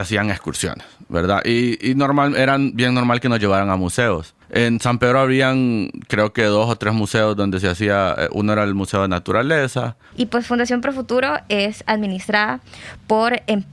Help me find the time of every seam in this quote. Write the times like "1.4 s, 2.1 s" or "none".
4.4 s, 10.1 s